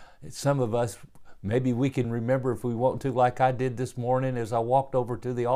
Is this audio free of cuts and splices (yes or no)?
no